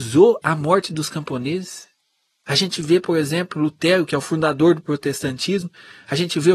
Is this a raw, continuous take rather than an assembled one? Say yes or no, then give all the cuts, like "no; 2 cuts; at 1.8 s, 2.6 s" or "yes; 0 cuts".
yes; 0 cuts